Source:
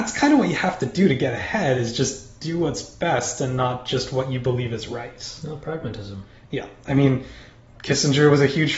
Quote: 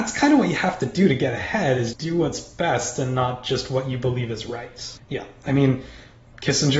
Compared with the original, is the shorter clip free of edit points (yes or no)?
no